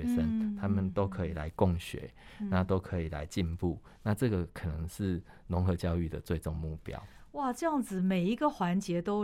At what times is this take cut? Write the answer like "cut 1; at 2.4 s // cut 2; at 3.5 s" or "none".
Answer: none